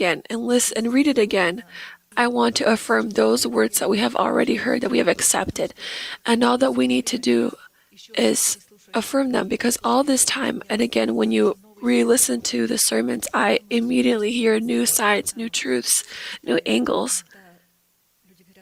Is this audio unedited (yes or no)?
no